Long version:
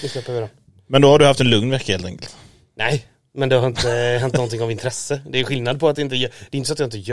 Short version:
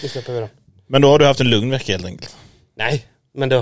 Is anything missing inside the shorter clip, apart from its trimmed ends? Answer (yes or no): no